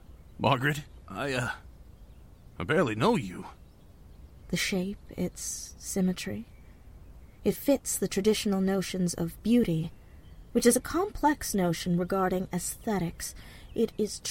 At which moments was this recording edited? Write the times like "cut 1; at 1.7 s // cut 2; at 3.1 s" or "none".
cut 1; at 4.4 s